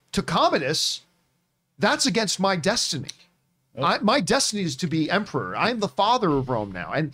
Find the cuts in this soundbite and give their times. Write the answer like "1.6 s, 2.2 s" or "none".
none